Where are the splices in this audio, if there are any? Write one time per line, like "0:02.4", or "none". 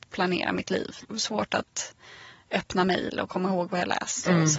0:01.1